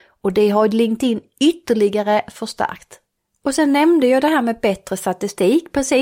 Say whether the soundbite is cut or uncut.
uncut